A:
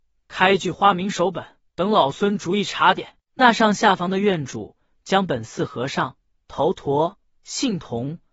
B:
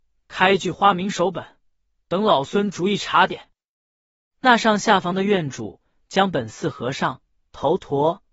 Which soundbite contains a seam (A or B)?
A